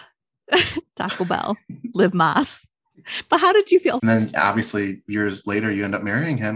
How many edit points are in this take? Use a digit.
1